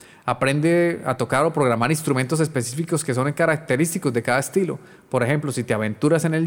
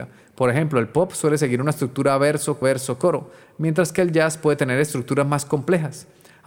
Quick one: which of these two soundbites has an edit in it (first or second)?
second